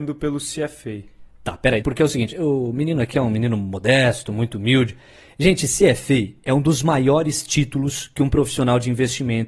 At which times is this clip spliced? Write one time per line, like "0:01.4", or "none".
0:01.8

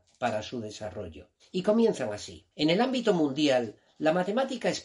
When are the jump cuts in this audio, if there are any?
0:01.4
0:02.5

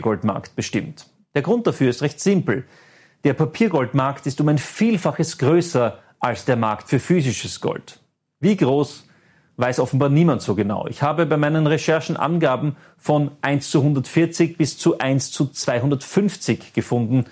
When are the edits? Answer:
none

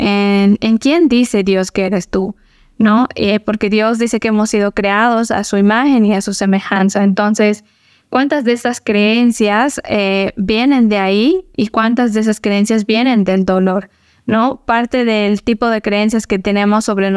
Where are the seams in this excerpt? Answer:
none

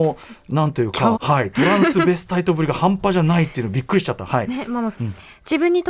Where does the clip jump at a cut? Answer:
0:01.1
0:04.9

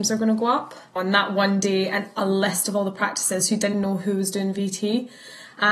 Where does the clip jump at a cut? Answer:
0:01.0
0:03.7

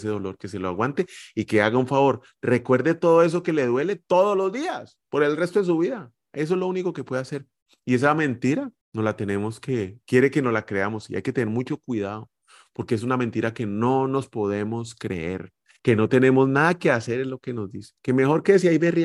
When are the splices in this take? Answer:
0:08.8
0:15.8

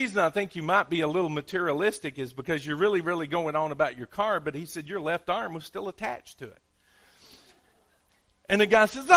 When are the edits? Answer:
none

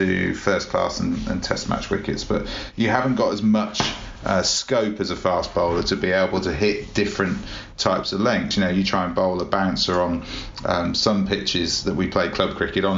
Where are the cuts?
none

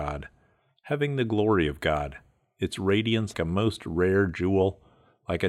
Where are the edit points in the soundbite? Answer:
0:03.3

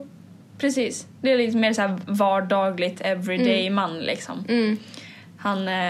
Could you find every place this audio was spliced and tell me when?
none

